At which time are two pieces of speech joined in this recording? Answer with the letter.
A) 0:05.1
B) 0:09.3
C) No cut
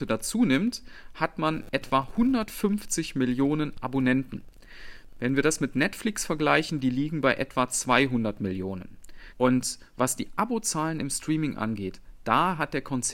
B